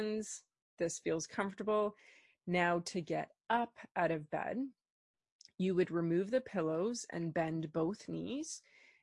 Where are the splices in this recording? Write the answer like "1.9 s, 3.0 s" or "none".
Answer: none